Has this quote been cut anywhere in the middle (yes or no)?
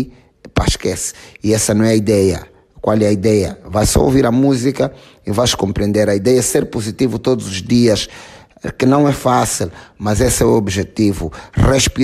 no